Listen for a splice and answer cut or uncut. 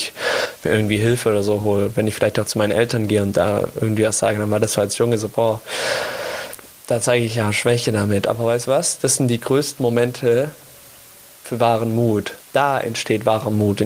uncut